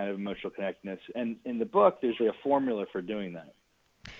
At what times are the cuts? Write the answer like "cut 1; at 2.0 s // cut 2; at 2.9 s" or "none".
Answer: cut 1; at 2.2 s